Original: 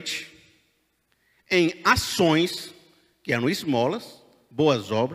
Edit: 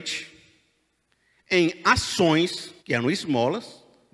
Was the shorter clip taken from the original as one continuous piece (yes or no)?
no